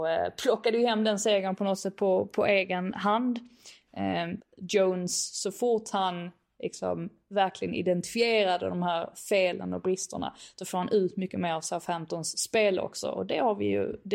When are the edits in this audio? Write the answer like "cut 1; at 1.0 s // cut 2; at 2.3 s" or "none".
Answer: cut 1; at 4.4 s